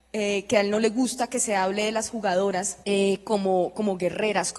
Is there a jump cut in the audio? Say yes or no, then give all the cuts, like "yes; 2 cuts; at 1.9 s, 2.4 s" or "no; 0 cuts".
yes; 1 cut; at 2.8 s